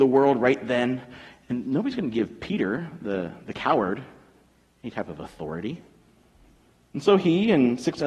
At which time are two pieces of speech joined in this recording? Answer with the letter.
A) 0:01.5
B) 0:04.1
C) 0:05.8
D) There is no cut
D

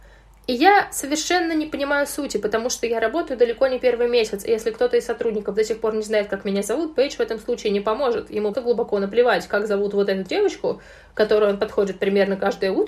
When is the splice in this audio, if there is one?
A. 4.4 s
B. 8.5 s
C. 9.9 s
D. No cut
B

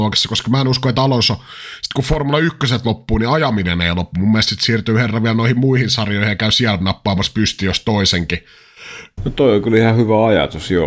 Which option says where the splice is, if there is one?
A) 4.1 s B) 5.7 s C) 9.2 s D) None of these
C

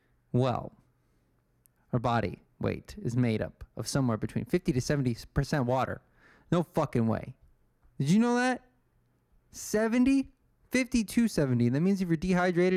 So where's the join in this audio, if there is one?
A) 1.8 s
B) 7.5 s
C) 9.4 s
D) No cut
A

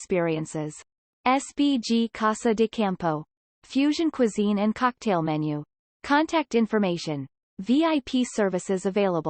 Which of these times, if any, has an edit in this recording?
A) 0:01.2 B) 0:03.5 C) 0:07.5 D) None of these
B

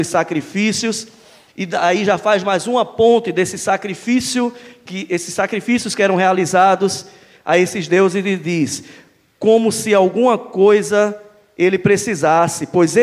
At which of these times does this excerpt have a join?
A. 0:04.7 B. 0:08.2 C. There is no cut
C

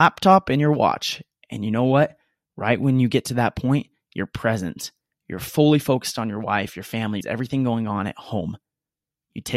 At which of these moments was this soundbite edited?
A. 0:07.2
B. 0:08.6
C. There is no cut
A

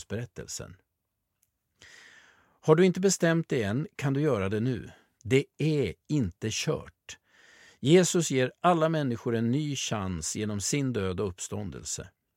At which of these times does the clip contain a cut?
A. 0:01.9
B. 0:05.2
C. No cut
B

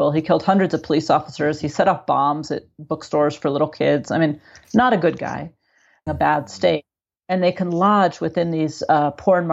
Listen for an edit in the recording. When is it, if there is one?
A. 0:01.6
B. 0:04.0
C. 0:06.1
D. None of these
C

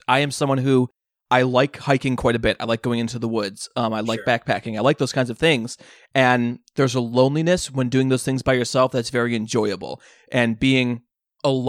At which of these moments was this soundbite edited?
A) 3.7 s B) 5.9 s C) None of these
C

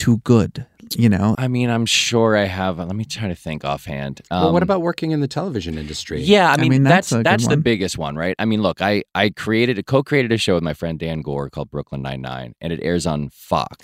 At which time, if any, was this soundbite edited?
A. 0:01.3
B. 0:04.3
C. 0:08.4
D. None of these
A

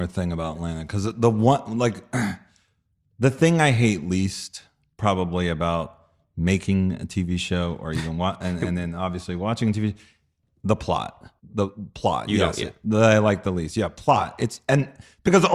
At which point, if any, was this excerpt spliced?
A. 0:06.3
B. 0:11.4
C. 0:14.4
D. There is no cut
B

